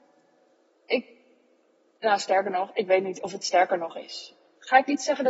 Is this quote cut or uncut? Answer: uncut